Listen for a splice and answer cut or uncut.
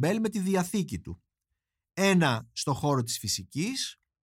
uncut